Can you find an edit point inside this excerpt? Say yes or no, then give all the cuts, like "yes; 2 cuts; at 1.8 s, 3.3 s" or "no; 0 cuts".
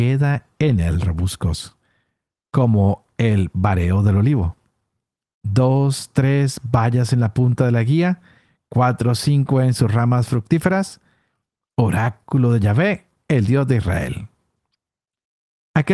no; 0 cuts